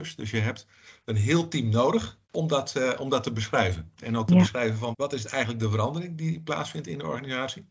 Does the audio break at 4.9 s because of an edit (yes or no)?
yes